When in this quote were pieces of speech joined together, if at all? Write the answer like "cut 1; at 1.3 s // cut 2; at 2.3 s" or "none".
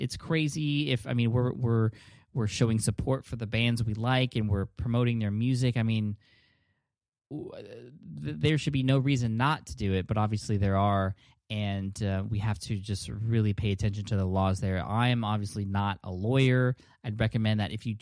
none

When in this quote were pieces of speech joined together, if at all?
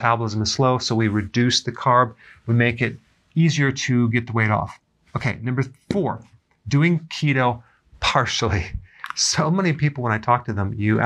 none

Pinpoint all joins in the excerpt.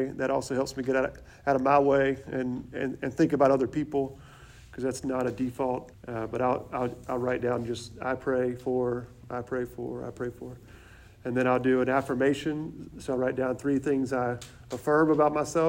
cut 1; at 5.9 s

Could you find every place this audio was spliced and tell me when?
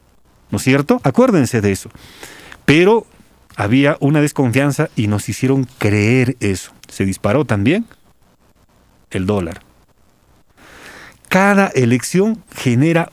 cut 1; at 6.8 s

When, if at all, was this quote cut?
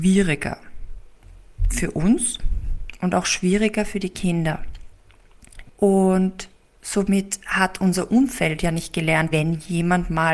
cut 1; at 5.7 s // cut 2; at 9.3 s

